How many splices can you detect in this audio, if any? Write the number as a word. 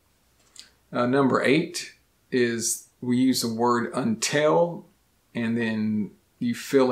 zero